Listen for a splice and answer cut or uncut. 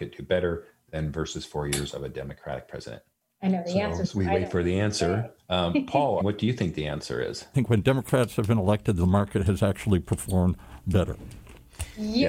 cut